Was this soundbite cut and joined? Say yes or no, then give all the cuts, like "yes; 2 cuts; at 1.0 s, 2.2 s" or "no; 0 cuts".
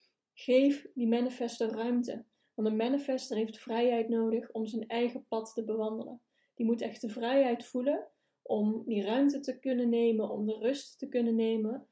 no; 0 cuts